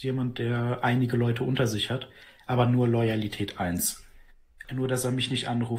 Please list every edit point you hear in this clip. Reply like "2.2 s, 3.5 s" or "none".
4.6 s